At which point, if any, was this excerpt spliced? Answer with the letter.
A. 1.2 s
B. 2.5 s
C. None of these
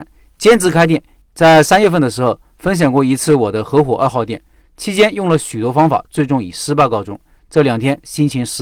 A